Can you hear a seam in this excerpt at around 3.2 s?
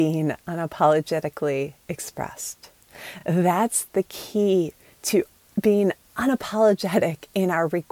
no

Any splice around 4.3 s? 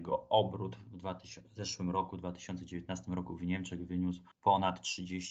yes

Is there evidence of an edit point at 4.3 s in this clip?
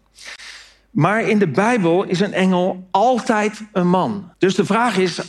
yes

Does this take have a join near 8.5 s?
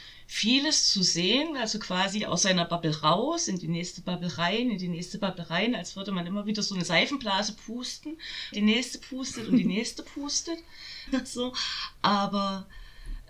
yes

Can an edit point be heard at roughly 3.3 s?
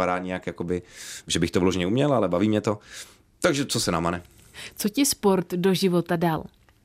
no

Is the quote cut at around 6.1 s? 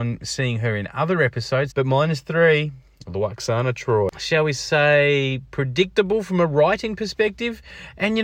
no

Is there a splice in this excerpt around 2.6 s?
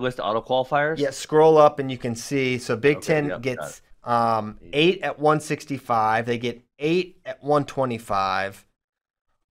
no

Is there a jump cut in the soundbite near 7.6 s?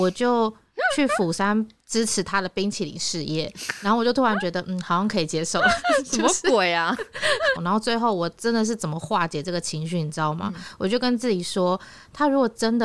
yes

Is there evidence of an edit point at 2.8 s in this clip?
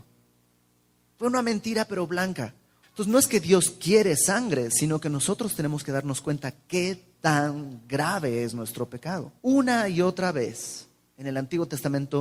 yes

